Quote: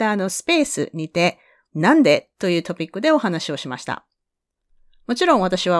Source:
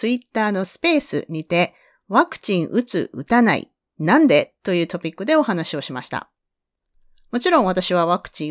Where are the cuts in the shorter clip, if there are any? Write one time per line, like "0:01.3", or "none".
0:01.7